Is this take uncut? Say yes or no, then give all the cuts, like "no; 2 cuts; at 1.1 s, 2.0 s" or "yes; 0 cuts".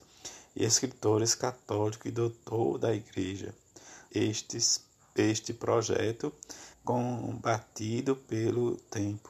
no; 2 cuts; at 4.1 s, 6.7 s